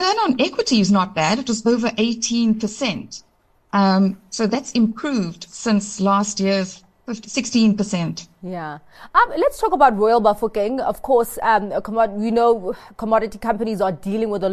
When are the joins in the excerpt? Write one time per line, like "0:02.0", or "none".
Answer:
none